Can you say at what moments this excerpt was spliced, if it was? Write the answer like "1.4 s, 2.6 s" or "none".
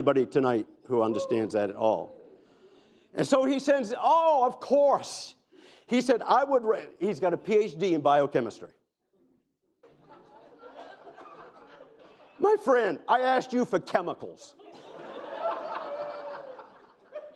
9.8 s